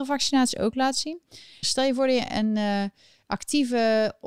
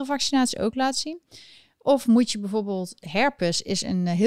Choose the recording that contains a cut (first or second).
first